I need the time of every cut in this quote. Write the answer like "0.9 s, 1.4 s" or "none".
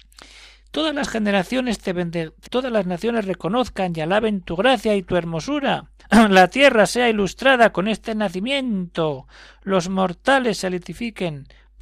2.5 s, 6.0 s